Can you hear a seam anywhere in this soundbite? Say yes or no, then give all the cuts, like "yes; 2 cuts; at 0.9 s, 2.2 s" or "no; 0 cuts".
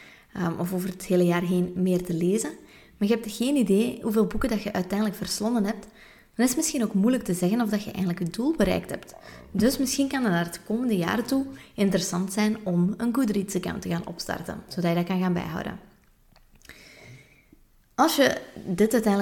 no; 0 cuts